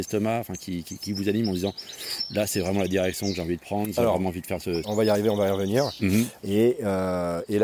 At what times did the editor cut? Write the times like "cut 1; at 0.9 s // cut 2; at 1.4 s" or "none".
cut 1; at 4.8 s // cut 2; at 6.4 s

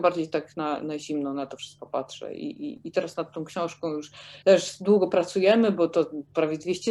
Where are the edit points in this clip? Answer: cut 1; at 4.4 s

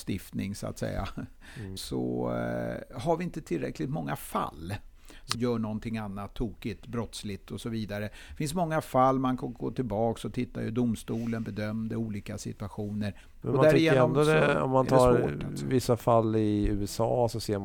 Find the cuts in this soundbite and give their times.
cut 1; at 1.8 s // cut 2; at 5.3 s // cut 3; at 13.4 s

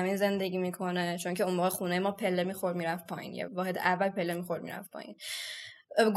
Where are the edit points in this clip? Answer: cut 1; at 3.5 s

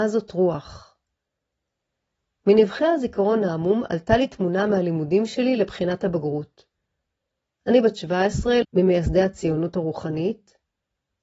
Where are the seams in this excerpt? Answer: cut 1; at 8.6 s

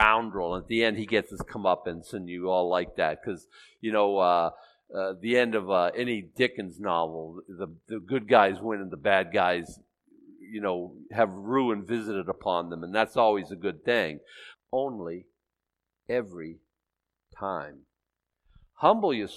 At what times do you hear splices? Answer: cut 1; at 14.5 s

